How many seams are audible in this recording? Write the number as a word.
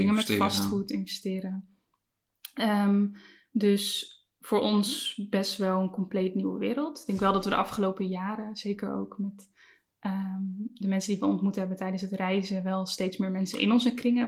zero